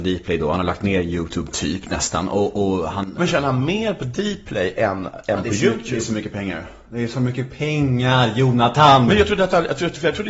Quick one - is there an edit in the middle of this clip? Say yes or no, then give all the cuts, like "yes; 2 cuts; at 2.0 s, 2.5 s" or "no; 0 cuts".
no; 0 cuts